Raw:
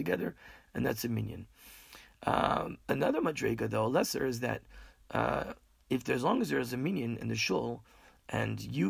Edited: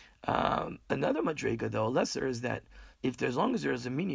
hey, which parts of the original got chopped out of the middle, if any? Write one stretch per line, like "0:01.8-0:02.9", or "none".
0:04.9-0:05.8